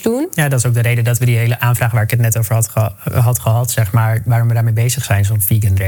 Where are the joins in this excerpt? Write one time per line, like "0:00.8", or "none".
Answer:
none